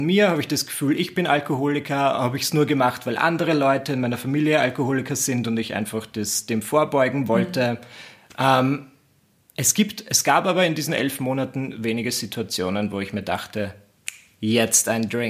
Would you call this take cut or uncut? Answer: uncut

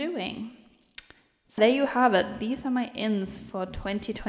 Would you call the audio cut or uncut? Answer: cut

